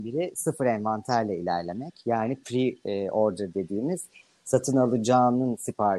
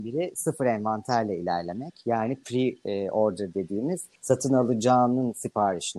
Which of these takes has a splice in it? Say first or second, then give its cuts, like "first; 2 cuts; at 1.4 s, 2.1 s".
second; 1 cut; at 4.2 s